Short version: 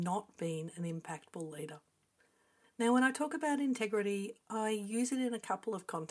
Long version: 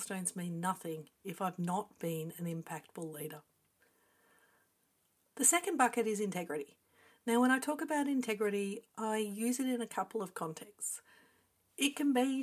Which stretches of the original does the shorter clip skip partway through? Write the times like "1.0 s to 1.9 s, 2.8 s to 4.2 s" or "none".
4.3 s to 7.1 s